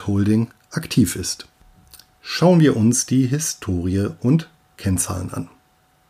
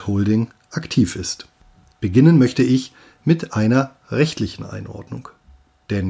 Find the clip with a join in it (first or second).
second